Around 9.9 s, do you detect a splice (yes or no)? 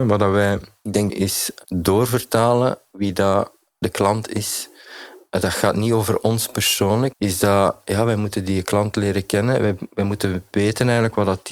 no